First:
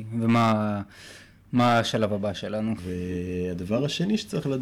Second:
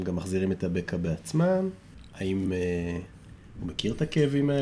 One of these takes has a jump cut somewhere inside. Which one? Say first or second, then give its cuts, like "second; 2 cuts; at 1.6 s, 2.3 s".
first; 1 cut; at 2.8 s